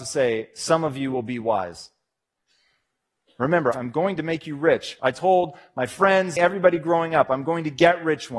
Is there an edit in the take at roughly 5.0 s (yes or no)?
yes